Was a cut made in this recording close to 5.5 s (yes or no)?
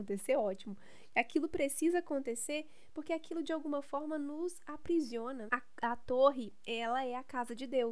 yes